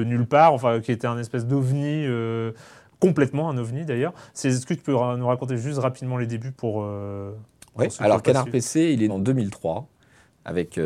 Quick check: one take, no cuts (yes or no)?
no